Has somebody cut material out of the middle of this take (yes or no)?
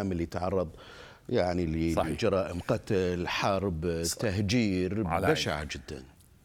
no